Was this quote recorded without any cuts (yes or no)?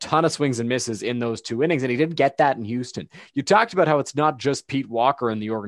no